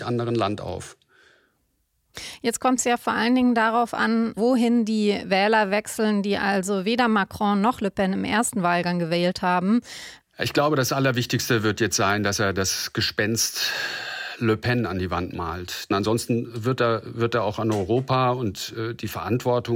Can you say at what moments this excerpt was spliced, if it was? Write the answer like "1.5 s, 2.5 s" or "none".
10.2 s